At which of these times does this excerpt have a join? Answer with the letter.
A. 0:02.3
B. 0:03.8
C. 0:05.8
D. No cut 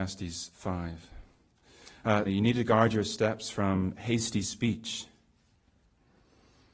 A